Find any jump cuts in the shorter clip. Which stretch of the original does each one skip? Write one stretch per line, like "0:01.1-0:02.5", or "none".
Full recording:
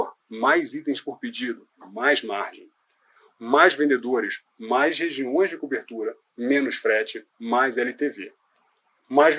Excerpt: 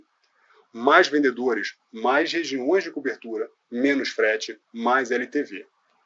none

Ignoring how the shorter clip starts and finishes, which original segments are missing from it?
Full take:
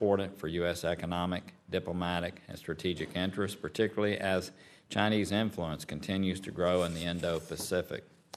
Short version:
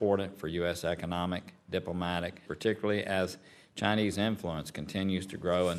0:02.5-0:03.6

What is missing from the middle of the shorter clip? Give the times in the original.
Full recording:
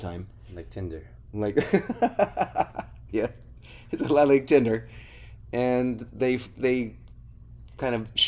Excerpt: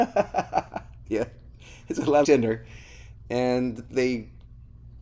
0:04.3-0:04.5
0:06.1-0:06.6

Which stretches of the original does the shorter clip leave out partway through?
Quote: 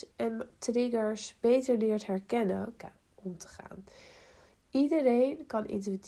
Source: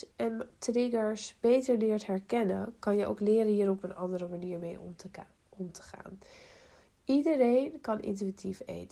0:02.8-0:05.1

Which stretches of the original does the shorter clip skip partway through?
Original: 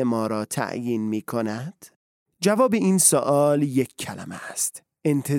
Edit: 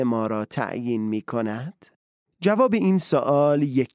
none

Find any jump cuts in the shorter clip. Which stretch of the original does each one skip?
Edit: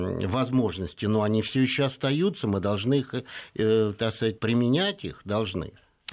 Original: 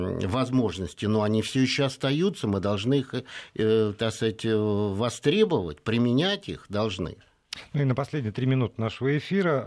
0:04.4-0:05.8

